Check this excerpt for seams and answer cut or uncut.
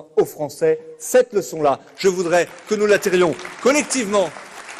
uncut